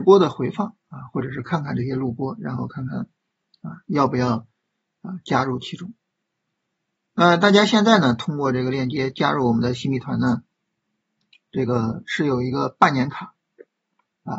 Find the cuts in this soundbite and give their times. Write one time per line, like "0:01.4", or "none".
none